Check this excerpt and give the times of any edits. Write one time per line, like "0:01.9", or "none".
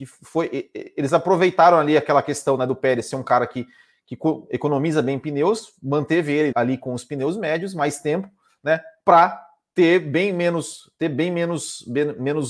0:06.5